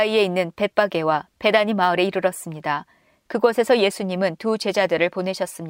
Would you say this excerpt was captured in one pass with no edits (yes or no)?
yes